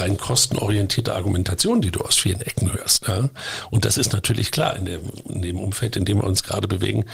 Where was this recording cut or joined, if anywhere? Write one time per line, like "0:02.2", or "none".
none